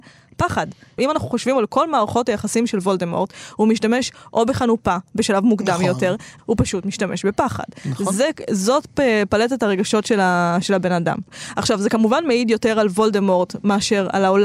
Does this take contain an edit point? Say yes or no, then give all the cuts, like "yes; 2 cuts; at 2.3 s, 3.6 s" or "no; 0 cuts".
yes; 1 cut; at 6.4 s